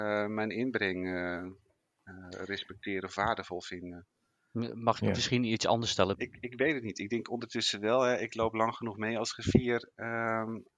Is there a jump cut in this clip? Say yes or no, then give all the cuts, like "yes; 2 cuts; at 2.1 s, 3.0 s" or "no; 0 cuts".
yes; 1 cut; at 6.1 s